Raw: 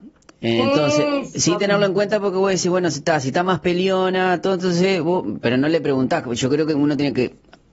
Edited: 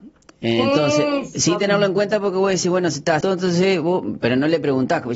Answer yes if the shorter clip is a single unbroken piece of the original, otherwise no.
no